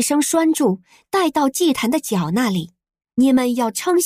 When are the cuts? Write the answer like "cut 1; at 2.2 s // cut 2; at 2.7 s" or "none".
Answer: cut 1; at 3.0 s

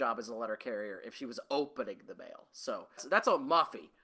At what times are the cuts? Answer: cut 1; at 3.0 s

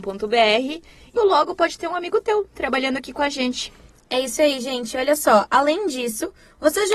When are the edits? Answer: cut 1; at 1.2 s

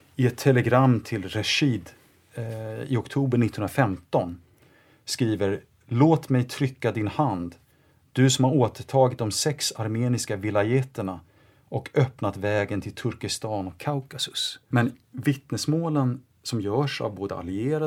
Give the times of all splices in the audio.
cut 1; at 14.7 s

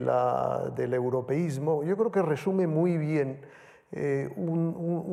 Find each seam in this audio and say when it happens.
none

